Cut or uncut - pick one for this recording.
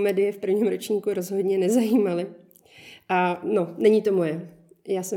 uncut